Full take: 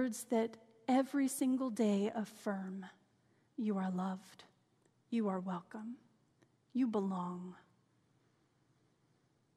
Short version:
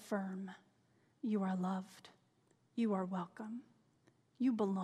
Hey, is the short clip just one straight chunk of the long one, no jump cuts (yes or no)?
yes